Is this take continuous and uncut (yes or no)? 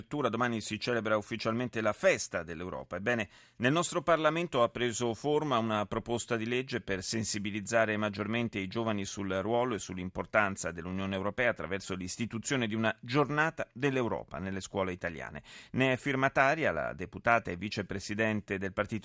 yes